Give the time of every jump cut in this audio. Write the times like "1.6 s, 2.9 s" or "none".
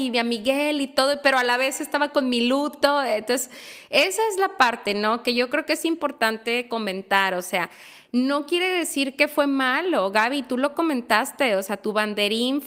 none